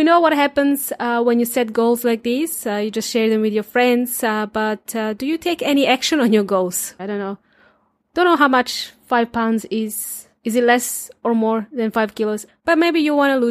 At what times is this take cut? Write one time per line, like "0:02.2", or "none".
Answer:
0:07.0
0:12.5